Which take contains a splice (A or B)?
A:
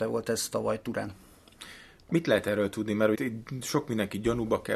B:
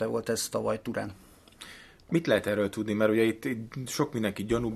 A